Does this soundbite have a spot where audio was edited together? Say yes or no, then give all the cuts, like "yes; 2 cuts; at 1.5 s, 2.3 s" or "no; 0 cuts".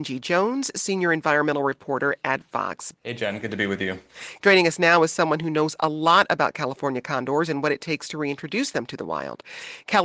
yes; 2 cuts; at 2.9 s, 4.4 s